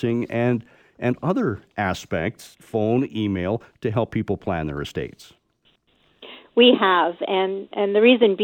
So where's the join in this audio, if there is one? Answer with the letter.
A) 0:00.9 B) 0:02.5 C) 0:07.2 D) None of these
B